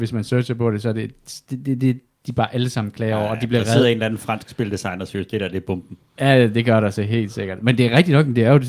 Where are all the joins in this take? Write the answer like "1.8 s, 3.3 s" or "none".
none